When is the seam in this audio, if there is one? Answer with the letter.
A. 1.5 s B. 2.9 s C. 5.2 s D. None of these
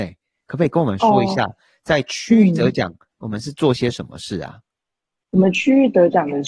D